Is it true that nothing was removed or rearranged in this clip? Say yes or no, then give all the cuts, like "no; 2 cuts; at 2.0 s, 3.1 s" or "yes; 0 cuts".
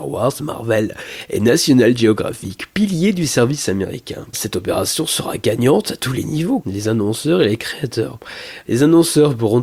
no; 3 cuts; at 4.3 s, 6.6 s, 8.6 s